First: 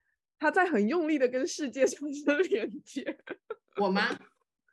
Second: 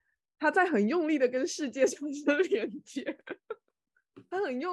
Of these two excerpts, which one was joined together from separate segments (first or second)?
second